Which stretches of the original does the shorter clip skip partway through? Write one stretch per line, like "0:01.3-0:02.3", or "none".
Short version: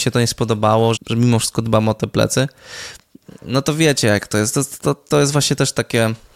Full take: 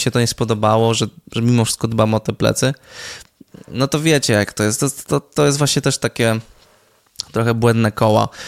0:01.0-0:01.2